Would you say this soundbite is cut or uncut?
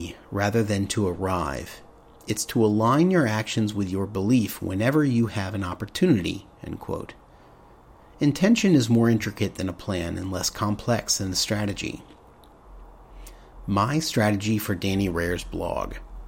uncut